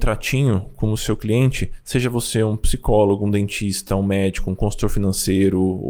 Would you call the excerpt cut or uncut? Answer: uncut